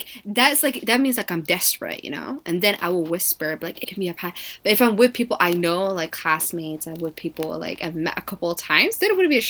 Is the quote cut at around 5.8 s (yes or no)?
no